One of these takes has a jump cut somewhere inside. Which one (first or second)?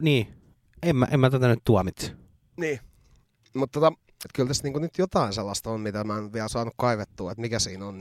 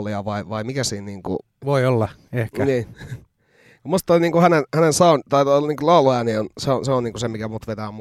first